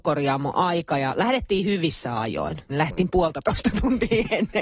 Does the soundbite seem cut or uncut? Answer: cut